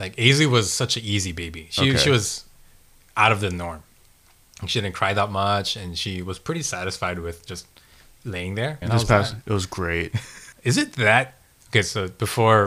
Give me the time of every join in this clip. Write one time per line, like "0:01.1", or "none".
0:08.8
0:10.5